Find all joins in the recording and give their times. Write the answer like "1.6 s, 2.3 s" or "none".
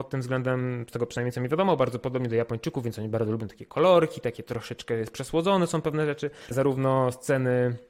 6.5 s